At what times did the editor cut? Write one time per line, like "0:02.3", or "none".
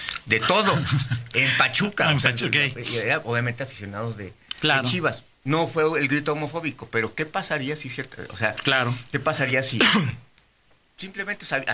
none